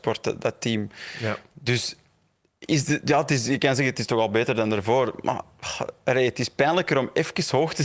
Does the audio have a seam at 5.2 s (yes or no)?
no